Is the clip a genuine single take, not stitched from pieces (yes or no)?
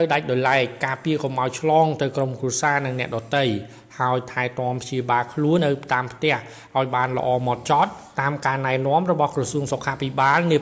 no